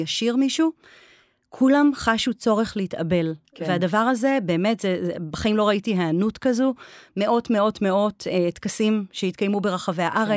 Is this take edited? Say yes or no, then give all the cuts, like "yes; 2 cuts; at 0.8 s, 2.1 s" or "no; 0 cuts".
no; 0 cuts